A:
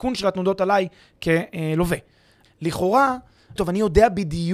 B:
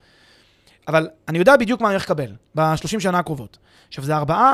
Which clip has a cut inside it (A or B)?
A